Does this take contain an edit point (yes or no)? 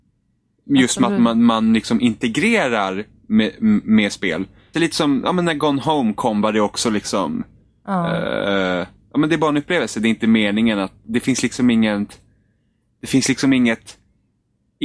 yes